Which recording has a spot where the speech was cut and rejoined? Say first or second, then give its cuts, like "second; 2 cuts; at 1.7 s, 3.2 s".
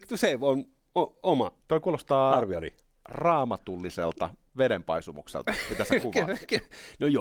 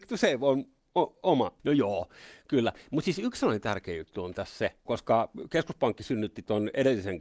second; 2 cuts; at 1.6 s, 4.9 s